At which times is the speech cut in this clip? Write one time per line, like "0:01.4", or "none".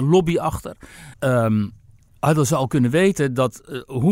0:01.1